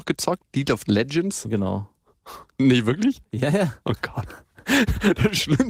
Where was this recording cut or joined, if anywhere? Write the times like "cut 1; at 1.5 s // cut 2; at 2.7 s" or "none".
none